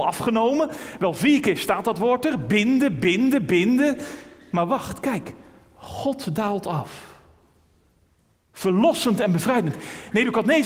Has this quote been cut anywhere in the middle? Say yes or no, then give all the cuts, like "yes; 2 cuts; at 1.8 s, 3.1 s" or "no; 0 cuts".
no; 0 cuts